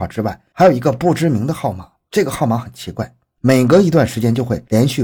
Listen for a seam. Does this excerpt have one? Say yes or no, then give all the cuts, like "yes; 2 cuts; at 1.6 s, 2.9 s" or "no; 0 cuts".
no; 0 cuts